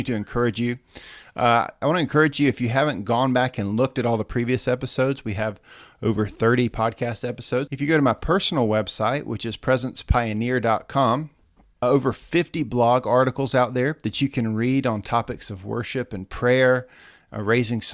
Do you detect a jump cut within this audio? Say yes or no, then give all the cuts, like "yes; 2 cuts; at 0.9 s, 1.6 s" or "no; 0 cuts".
yes; 2 cuts; at 7.7 s, 11.8 s